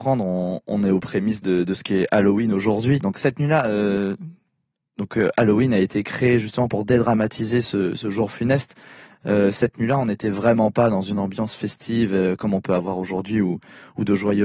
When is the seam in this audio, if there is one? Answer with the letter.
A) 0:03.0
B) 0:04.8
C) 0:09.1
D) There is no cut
A